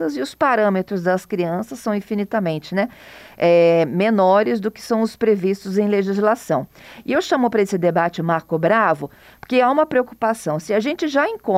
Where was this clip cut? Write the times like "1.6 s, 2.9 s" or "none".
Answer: none

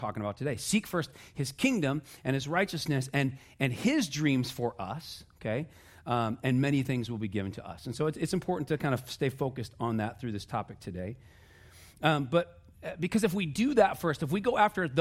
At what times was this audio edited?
none

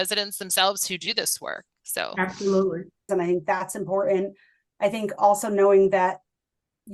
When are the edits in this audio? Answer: 3.1 s

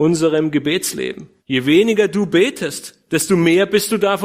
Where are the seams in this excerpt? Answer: 1.4 s

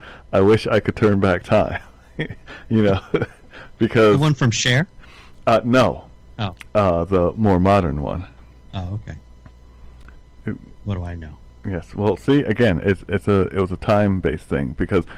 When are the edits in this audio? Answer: none

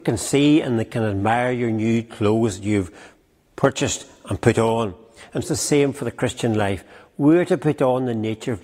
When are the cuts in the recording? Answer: 5.4 s

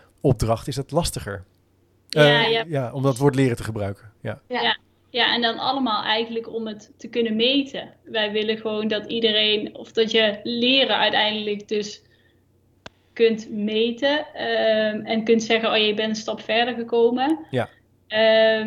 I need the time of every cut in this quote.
none

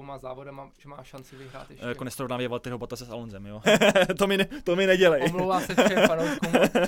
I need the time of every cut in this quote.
3.6 s

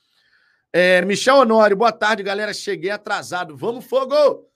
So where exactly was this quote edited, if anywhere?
none

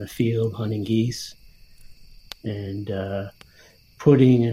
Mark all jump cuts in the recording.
2.4 s

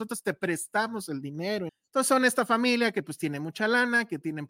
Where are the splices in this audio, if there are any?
1.7 s

